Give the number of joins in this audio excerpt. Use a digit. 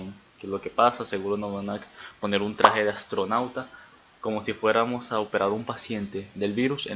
0